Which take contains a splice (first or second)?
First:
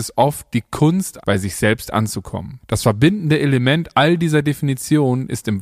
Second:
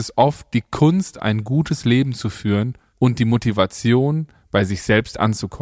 first